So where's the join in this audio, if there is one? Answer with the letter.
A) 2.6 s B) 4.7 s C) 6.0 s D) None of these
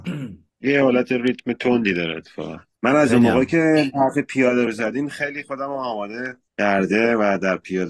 B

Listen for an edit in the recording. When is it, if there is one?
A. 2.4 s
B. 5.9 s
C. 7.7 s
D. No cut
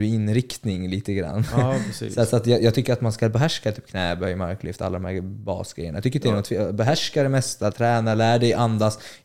D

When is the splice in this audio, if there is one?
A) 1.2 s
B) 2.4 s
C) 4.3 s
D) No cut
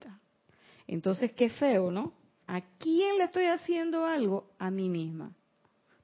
B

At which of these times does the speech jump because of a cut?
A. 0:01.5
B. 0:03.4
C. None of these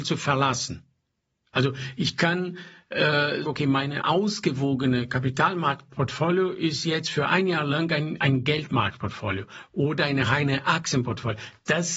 B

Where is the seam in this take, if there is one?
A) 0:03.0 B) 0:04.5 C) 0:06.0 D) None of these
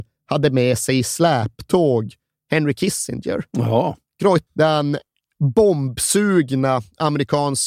B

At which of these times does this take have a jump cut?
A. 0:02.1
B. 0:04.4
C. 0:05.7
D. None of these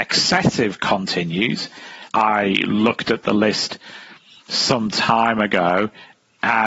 A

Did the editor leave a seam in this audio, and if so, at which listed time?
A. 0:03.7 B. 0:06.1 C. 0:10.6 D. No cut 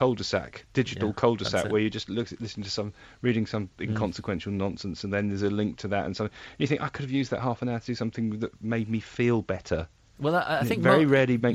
A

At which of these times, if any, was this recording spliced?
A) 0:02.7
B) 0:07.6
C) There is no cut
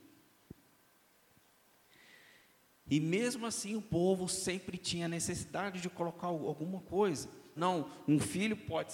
B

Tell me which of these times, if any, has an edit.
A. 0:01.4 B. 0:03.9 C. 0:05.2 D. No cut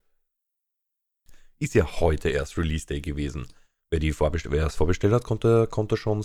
D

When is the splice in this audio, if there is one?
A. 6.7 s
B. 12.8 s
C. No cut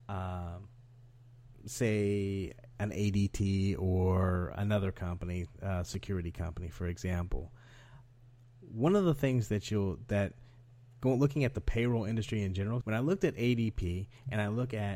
B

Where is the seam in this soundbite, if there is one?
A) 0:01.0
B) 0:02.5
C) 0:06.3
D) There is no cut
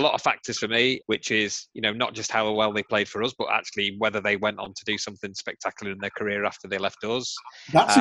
A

